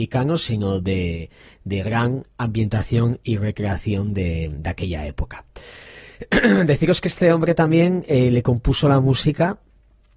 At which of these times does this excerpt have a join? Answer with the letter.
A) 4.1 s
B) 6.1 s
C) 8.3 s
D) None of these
B